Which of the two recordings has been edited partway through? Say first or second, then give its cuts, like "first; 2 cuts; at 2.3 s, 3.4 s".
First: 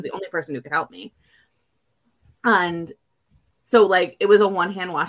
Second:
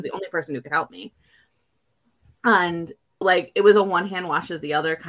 second; 1 cut; at 3.2 s